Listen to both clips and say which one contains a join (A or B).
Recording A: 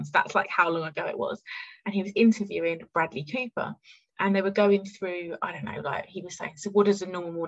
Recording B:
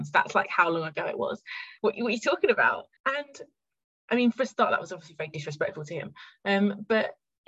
B